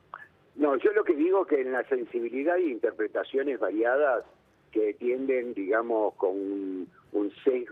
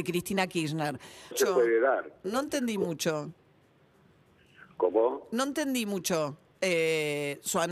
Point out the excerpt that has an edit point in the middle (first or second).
second